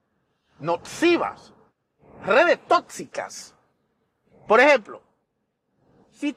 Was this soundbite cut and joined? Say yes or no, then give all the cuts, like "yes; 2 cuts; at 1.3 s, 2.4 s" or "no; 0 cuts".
no; 0 cuts